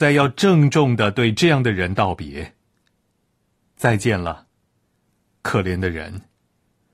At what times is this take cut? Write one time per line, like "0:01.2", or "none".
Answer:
none